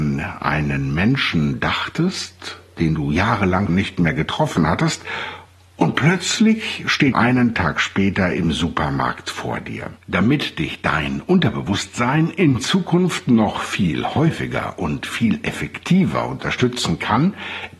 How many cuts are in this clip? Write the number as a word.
three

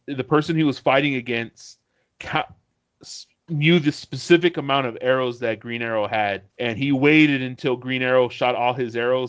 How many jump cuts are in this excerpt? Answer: one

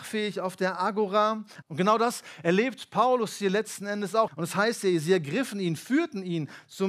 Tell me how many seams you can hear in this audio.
two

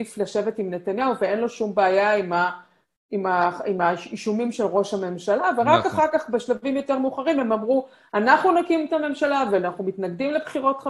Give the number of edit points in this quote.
zero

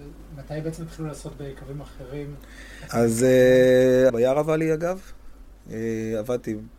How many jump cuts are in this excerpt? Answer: two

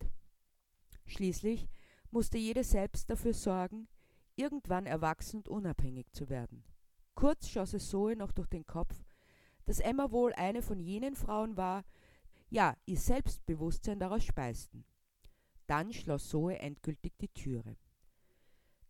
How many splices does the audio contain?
one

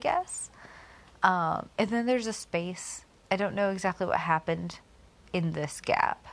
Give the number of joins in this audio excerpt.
zero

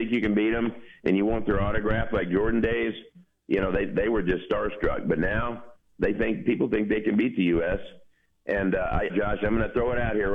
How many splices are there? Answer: one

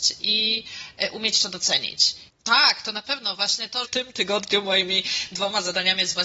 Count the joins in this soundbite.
two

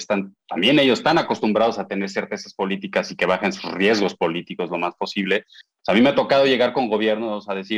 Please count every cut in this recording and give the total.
zero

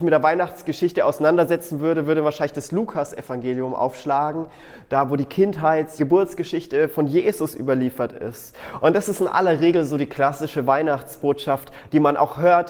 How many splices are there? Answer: one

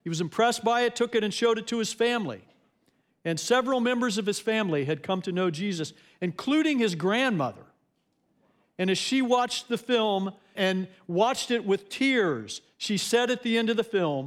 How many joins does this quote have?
one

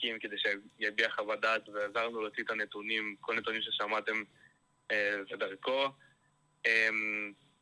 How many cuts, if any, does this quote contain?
one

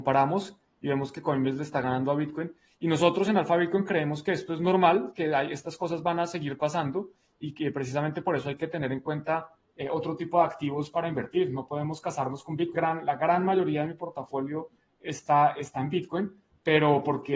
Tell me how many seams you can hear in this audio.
one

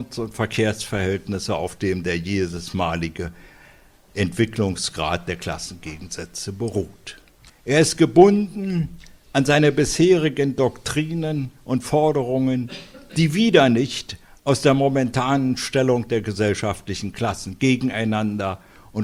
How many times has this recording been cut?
one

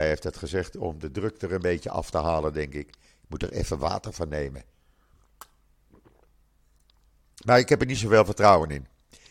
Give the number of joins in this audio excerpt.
zero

